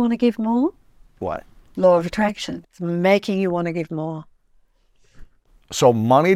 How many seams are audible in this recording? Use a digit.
1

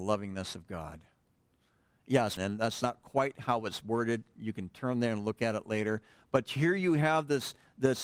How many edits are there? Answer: 1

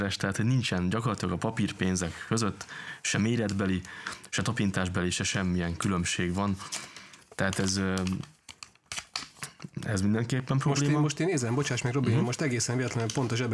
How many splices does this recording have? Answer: 1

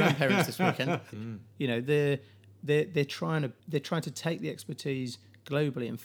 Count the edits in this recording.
2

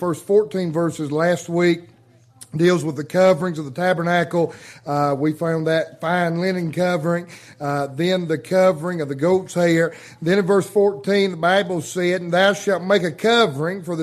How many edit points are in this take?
0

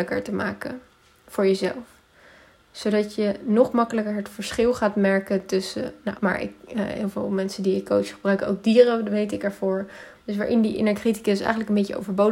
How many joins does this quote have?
2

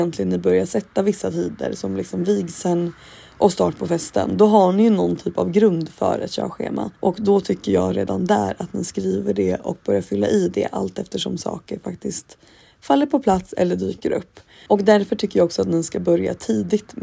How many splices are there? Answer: 2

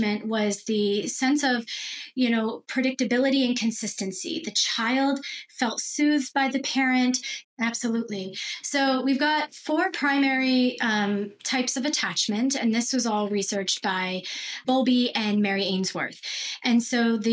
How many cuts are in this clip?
2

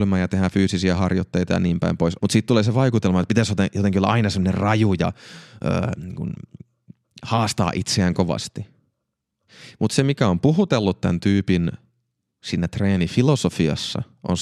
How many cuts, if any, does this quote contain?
1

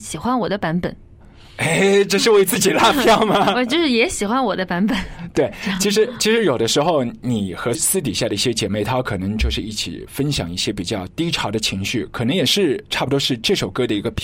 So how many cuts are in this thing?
0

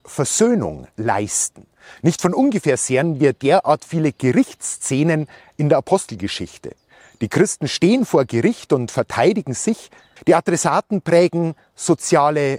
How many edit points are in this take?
1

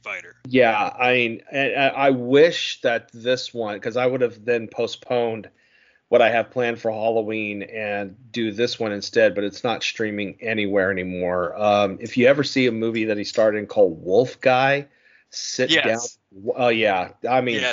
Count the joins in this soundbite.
0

